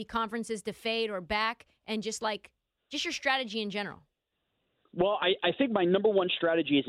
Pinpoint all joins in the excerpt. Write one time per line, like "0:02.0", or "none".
none